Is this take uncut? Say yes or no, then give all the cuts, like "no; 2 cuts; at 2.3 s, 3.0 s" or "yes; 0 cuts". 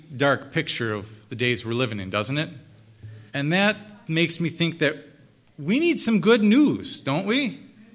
no; 1 cut; at 3.3 s